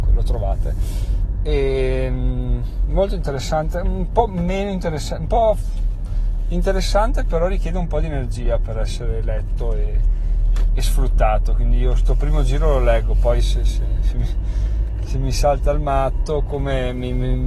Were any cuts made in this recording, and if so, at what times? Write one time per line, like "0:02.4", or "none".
none